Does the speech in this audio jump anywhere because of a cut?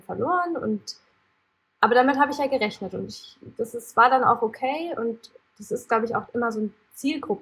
no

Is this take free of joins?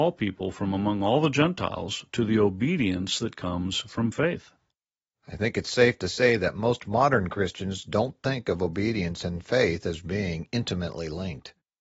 yes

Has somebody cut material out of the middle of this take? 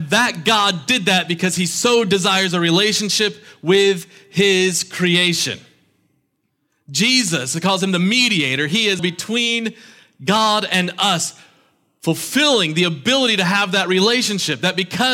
yes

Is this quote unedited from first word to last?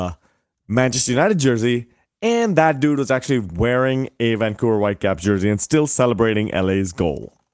yes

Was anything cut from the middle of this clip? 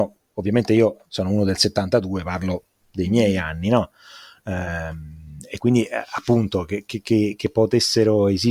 no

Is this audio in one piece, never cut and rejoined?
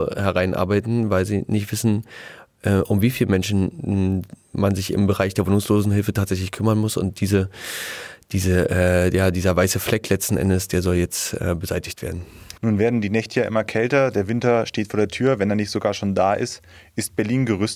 no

